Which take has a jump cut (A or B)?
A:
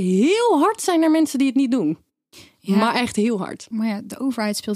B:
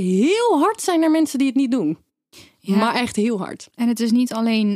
A